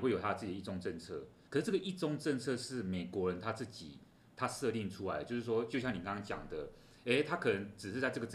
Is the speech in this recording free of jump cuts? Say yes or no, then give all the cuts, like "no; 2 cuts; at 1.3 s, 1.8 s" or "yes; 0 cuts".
no; 1 cut; at 1.5 s